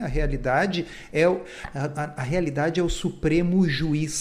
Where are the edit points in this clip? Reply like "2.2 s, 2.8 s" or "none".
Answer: 2.2 s